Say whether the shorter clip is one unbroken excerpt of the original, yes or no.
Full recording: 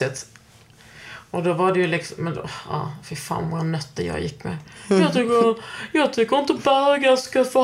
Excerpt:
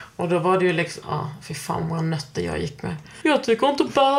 no